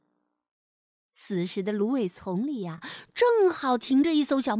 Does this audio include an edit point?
no; 0 cuts

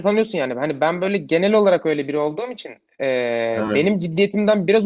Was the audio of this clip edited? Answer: no; 0 cuts

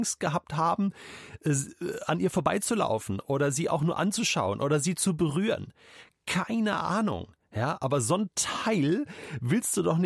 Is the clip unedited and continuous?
yes; 0 cuts

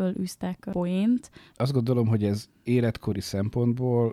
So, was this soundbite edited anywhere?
yes; 1 cut; at 1.5 s

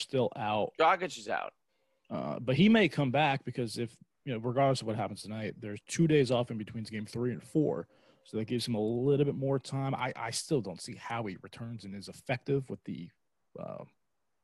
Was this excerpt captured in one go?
yes; 0 cuts

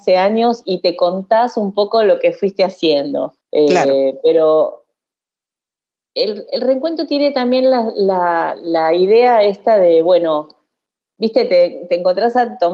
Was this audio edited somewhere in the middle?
yes; 1 cut; at 3.4 s

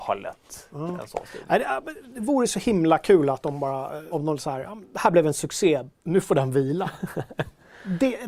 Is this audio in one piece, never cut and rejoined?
no; 2 cuts; at 4.1 s, 5.9 s

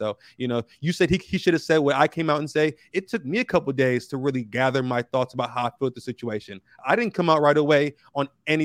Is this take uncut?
yes; 0 cuts

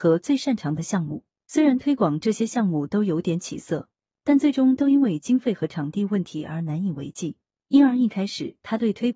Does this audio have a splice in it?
yes; 2 cuts; at 1.4 s, 7.6 s

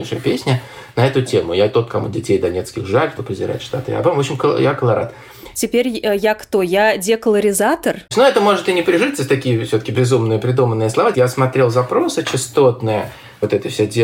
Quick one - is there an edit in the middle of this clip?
yes; 2 cuts; at 8.1 s, 11.1 s

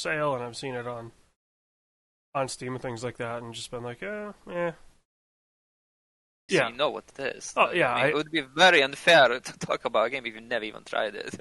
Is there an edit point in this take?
yes; 1 cut; at 6.5 s

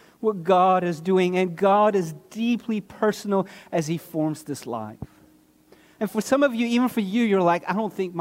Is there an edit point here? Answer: no; 0 cuts

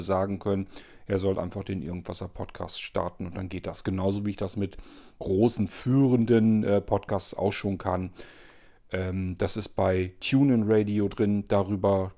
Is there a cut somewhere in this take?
no; 0 cuts

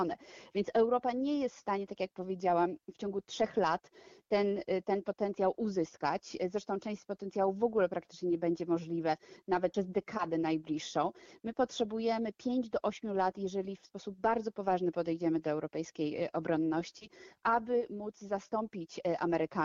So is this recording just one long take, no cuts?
no; 1 cut; at 9.7 s

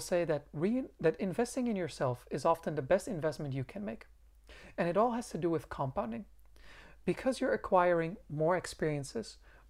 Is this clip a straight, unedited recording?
yes; 0 cuts

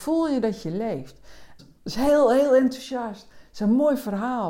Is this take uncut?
no; 1 cut; at 1.6 s

